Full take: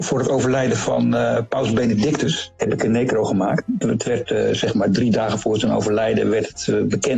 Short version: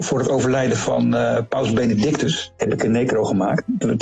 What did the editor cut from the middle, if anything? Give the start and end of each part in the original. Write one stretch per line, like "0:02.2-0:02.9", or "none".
none